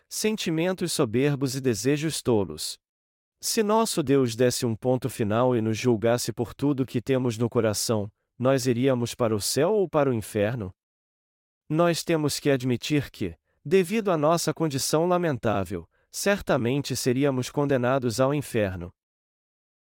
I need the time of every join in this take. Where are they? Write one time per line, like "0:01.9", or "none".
0:03.3